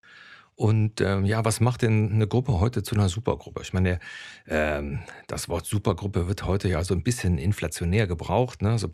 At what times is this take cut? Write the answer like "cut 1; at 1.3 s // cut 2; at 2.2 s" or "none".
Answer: none